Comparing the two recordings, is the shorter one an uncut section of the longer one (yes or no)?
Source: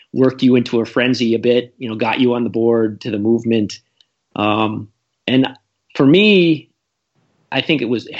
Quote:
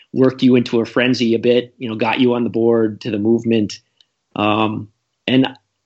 yes